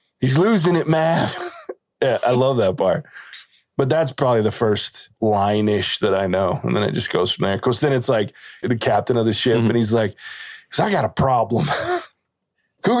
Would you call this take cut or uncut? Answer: cut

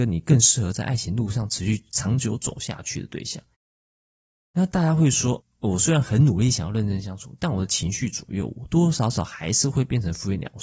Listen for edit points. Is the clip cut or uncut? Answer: uncut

